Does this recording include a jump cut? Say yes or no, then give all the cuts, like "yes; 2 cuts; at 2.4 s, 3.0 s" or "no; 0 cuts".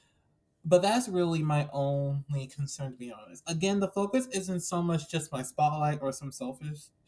no; 0 cuts